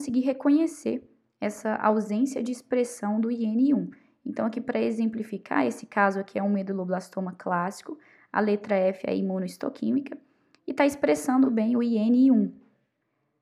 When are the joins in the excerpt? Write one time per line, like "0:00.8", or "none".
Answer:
0:11.4